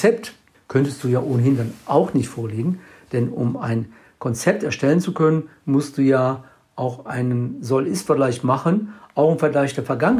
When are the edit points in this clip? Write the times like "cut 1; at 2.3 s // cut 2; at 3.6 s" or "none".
none